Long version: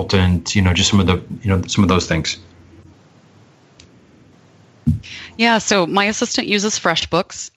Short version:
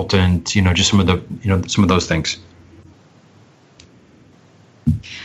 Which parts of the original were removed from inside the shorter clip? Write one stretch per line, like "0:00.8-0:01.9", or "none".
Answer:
none